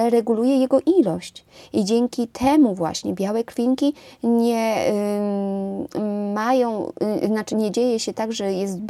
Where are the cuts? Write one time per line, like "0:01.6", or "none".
0:07.5